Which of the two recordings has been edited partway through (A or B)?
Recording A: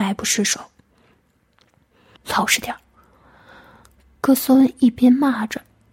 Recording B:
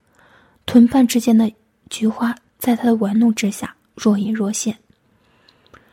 A